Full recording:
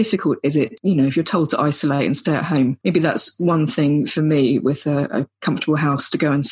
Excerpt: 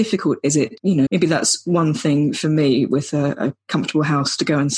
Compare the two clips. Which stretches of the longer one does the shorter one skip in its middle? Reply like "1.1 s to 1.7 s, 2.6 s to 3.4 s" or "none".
1.1 s to 2.8 s

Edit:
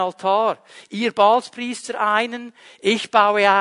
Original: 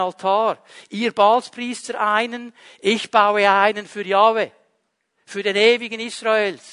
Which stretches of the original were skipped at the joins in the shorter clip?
none

